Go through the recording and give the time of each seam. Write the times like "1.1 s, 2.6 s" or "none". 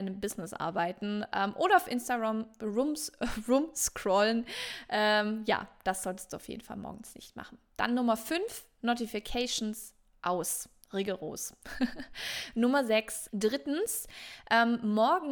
13.3 s